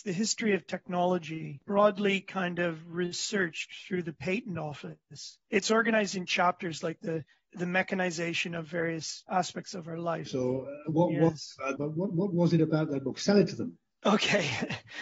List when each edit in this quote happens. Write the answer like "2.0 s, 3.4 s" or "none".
10.3 s, 11.8 s

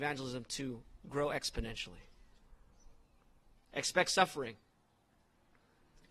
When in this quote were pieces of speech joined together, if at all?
3.6 s

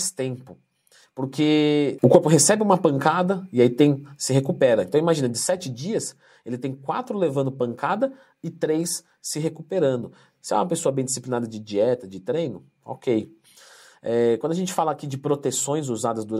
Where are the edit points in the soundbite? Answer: none

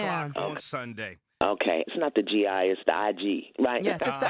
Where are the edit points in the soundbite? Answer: 1.9 s

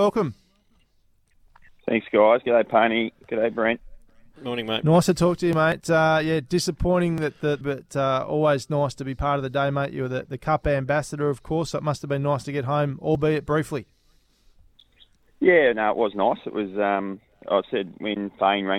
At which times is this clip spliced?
7.6 s

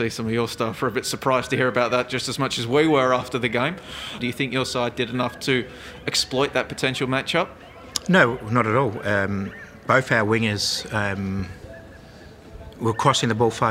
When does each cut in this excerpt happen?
4.2 s

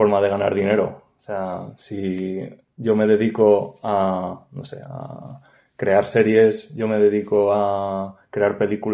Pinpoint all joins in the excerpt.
none

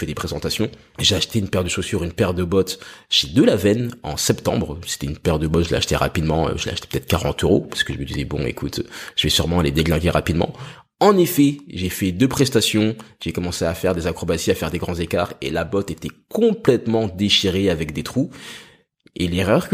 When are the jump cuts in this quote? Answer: none

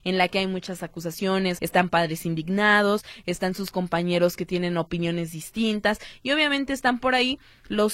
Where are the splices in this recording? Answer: 1.6 s

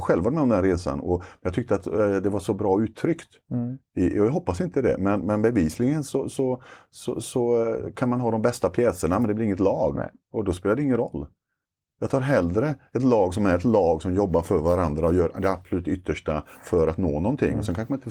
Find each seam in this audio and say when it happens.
none

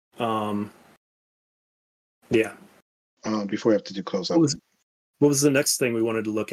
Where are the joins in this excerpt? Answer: 3.1 s

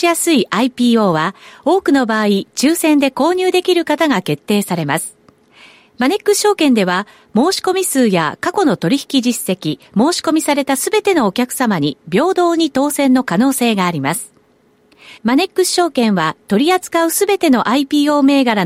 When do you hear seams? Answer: 9.8 s, 15.2 s

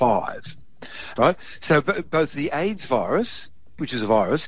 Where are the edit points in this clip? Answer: 1.2 s

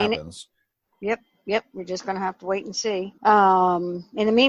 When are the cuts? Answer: 3.2 s

